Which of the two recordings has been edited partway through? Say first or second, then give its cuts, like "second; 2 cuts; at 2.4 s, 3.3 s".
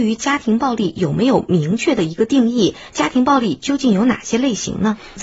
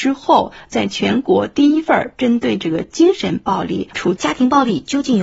second; 1 cut; at 4.2 s